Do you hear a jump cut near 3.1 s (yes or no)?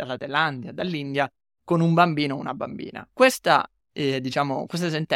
yes